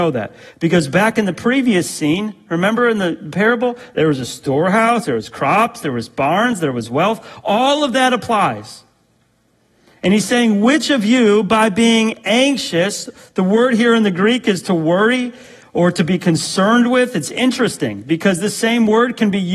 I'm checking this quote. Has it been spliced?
yes; 1 cut; at 5.0 s

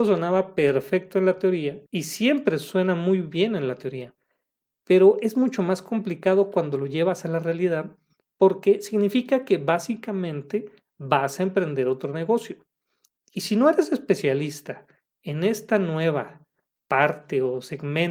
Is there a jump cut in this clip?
yes; 1 cut; at 1.9 s

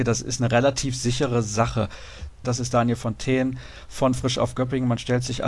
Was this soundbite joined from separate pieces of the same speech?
yes; 1 cut; at 2.4 s

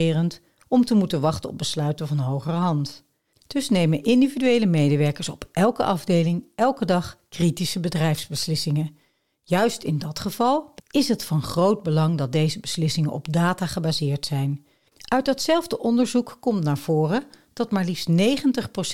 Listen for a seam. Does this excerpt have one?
yes; 2 cuts; at 10.8 s, 14.9 s

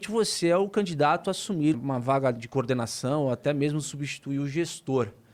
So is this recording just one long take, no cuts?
no; 1 cut; at 1.7 s

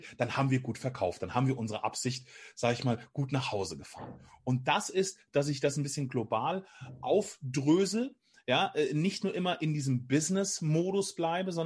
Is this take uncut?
yes; 0 cuts

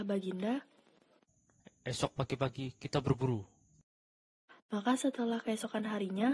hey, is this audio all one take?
no; 1 cut; at 1.6 s

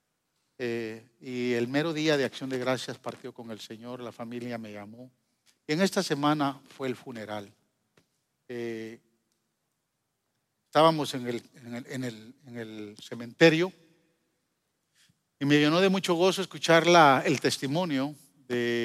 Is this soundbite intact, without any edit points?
yes; 0 cuts

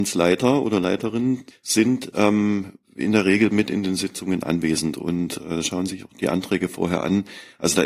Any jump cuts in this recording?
yes; 1 cut; at 1.5 s

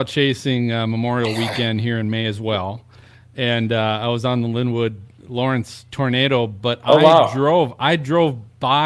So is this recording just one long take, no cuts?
yes; 0 cuts

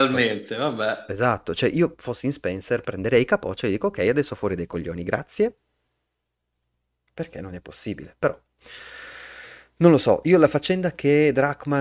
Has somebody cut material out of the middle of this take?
no; 0 cuts

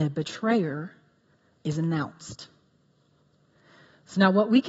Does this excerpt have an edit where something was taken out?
no; 0 cuts

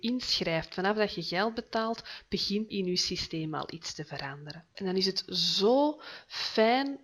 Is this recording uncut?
no; 2 cuts; at 2.7 s, 4.7 s

